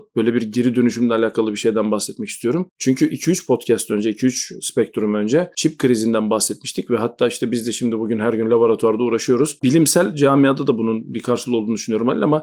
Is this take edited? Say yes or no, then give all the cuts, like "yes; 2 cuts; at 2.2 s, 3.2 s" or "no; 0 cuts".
yes; 1 cut; at 9.6 s